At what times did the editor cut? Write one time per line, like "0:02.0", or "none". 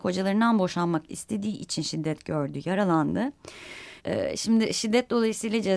0:04.0